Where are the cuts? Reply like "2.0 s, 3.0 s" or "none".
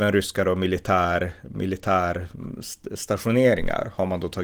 none